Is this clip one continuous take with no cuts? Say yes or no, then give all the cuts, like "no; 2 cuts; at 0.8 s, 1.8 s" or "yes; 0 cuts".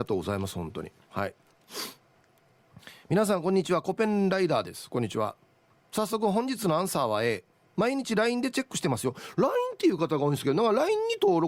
yes; 0 cuts